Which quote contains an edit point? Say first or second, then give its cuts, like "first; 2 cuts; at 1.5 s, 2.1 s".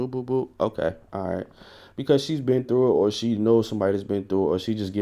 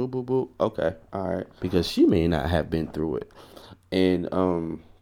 second; 1 cut; at 1.6 s